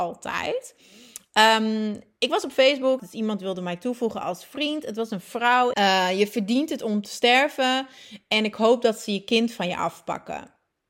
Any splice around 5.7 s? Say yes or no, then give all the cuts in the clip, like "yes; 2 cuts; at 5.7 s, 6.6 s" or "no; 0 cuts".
yes; 2 cuts; at 3.0 s, 5.7 s